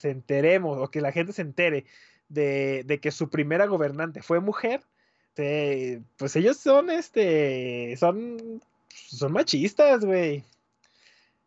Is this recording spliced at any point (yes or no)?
yes